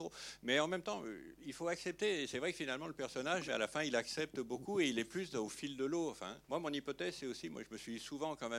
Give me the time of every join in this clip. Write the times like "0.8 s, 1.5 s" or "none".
3.5 s, 6.4 s